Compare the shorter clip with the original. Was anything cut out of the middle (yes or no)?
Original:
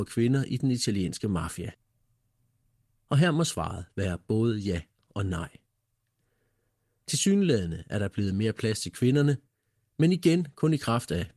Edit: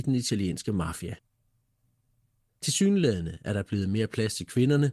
yes